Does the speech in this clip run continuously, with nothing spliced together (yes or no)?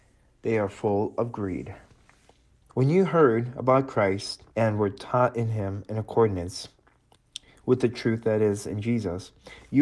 no